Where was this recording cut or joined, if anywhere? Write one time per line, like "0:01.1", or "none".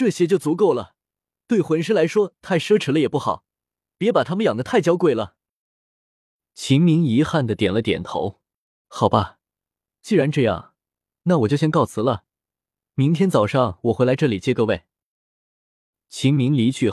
none